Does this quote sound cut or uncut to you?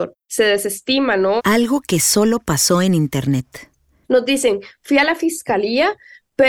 cut